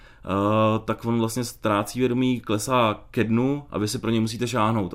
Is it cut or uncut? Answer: uncut